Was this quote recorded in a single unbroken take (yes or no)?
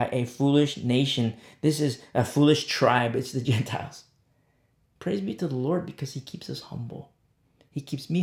no